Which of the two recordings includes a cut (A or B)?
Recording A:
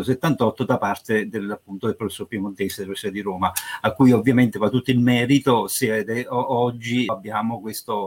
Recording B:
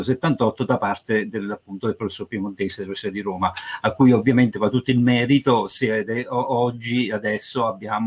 A